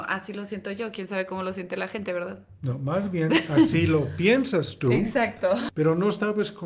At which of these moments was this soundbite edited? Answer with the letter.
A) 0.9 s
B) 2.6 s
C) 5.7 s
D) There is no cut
C